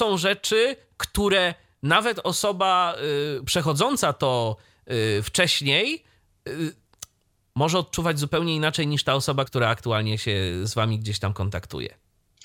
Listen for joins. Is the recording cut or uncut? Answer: cut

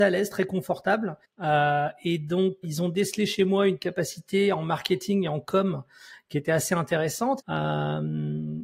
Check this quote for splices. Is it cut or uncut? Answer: cut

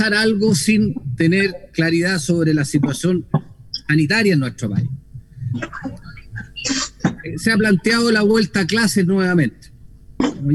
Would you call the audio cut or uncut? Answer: uncut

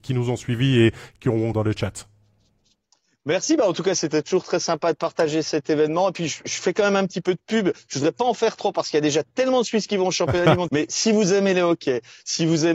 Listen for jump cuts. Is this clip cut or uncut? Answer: cut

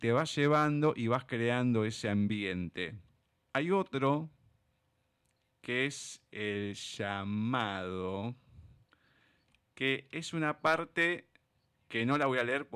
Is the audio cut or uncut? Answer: cut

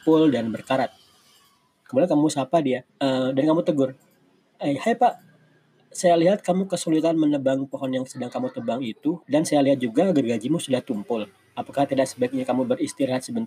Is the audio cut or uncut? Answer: cut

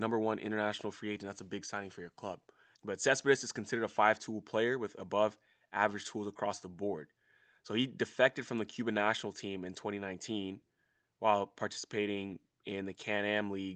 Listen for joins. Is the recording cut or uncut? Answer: cut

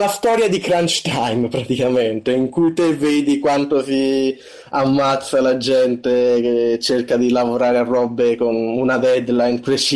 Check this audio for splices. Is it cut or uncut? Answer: uncut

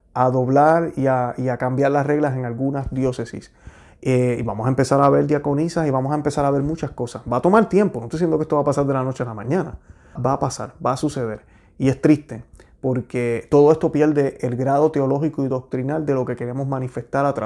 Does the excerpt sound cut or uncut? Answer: cut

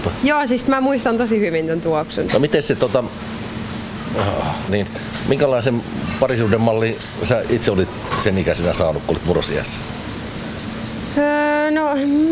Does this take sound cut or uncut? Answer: cut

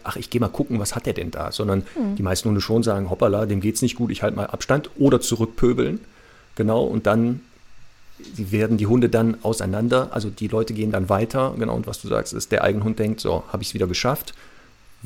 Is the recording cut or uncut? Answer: uncut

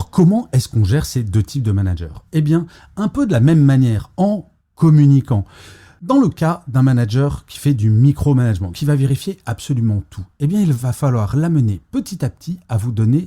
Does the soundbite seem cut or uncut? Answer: cut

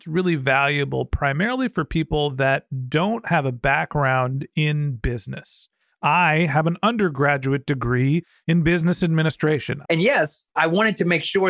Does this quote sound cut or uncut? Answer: cut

